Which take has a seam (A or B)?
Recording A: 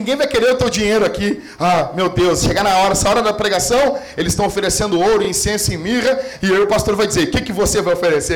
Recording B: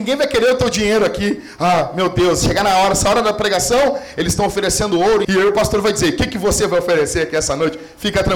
B